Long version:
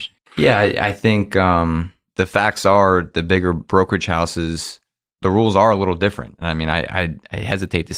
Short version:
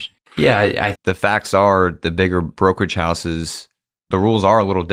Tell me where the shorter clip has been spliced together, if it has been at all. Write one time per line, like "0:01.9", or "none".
0:00.9